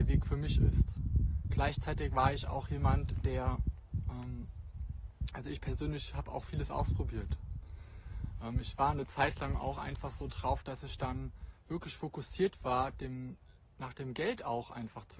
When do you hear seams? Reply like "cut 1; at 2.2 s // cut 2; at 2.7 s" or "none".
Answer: none